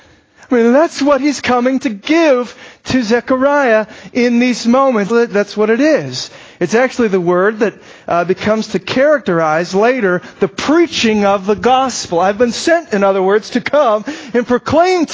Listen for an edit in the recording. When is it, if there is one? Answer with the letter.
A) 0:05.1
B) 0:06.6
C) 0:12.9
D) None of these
A